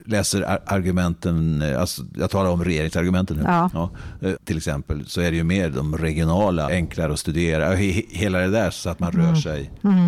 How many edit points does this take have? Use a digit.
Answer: 2